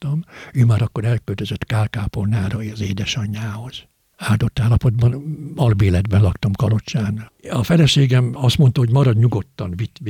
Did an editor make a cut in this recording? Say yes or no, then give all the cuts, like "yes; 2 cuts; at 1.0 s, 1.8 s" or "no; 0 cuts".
no; 0 cuts